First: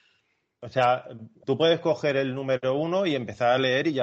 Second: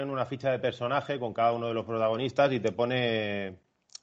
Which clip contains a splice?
first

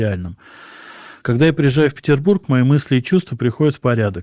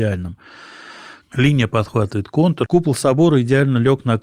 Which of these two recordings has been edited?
second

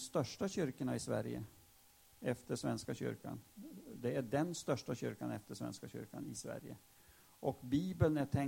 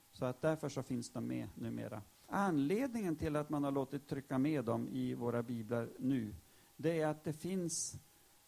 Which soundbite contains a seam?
second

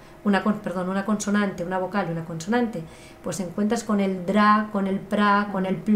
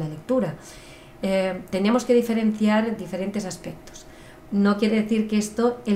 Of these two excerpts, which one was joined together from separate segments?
second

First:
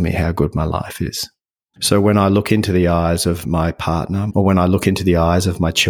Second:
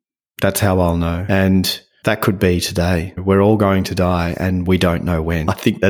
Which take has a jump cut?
first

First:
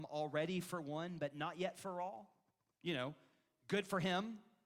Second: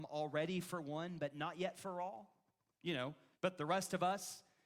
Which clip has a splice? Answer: second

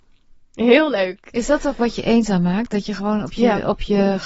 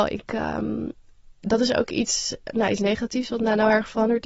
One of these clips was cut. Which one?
first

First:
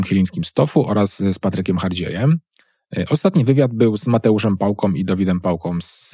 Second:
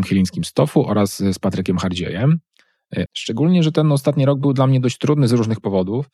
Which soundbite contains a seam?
second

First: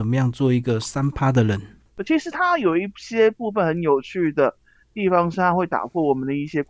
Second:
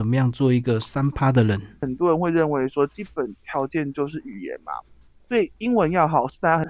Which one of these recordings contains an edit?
second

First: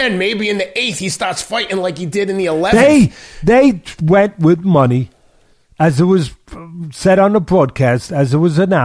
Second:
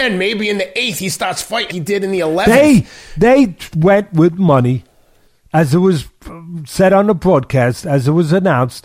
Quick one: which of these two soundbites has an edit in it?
second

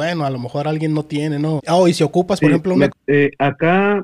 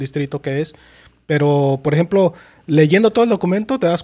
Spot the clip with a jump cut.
first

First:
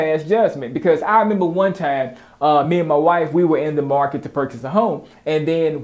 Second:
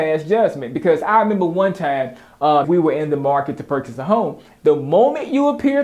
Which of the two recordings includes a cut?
second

